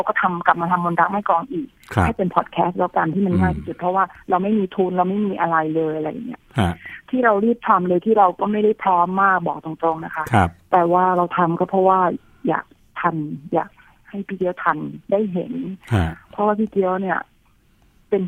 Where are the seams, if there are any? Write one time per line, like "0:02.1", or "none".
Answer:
0:15.0